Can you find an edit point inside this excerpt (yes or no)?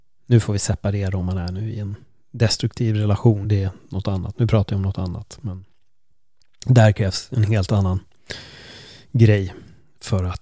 no